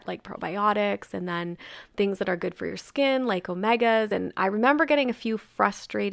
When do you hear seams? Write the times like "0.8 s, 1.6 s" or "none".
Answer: none